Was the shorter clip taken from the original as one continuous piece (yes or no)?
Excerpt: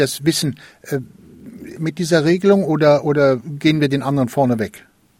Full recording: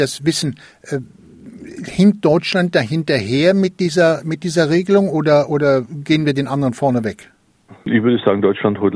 no